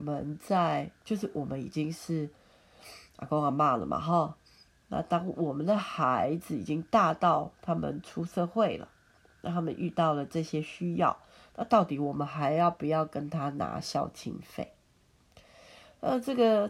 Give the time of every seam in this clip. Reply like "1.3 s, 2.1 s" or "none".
none